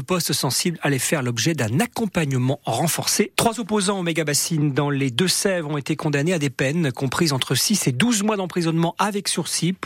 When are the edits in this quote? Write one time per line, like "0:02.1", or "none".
0:03.3